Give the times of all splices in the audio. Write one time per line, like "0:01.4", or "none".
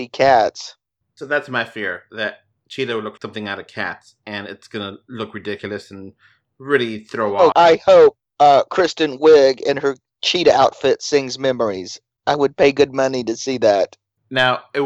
0:03.2
0:07.5